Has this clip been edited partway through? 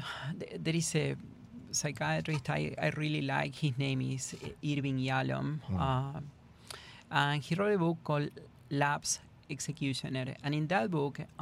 no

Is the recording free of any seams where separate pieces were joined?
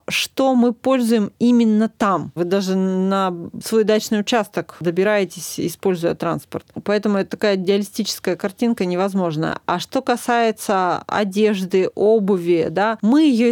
no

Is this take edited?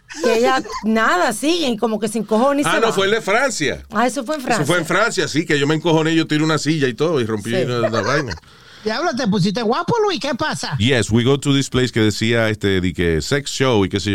no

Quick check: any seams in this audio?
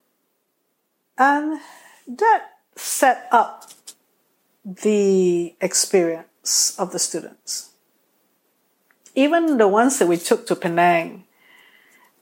no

